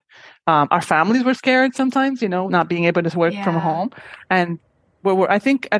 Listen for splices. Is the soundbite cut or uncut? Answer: cut